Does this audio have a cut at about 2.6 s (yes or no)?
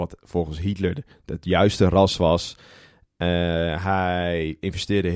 no